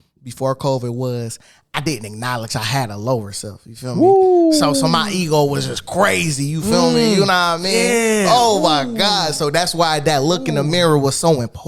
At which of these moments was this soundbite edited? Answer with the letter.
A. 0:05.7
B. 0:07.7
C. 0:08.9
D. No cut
D